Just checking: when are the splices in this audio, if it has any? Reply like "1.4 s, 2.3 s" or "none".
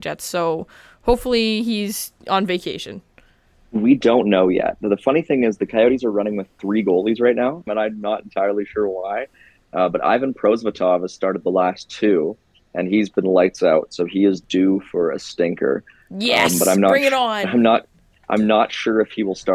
7.7 s